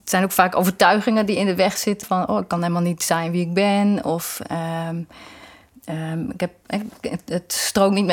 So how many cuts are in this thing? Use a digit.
1